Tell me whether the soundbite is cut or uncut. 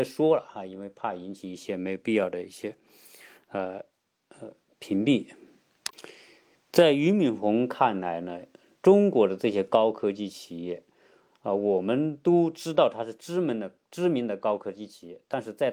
uncut